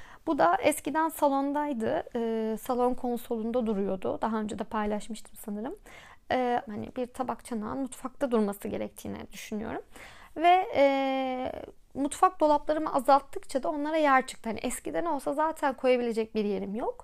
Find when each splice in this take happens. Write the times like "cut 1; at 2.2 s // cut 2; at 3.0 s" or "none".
cut 1; at 6.7 s